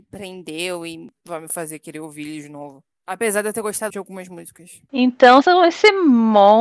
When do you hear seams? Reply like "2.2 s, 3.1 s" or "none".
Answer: 3.9 s, 5.4 s

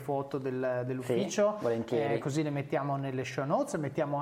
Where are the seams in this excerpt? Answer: none

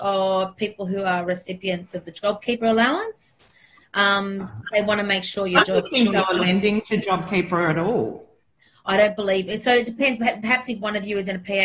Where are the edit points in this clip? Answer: none

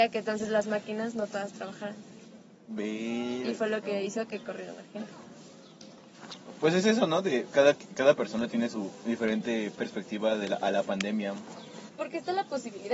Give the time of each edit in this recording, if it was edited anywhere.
11.9 s

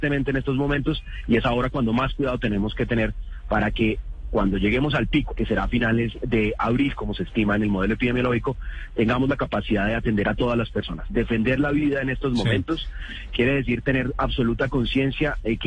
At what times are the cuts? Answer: 5.3 s

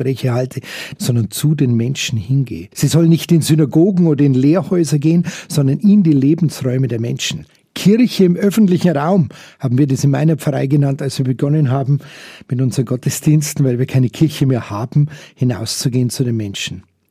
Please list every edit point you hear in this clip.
1.0 s, 2.7 s

